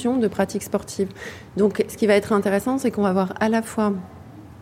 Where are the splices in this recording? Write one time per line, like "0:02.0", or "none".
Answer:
none

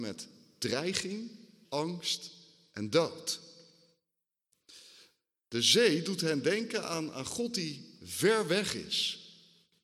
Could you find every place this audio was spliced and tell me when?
0:01.6

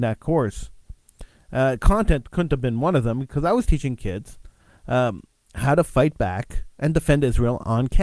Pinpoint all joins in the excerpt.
none

